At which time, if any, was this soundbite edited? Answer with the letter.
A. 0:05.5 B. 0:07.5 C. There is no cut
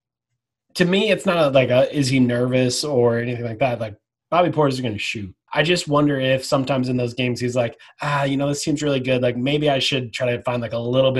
A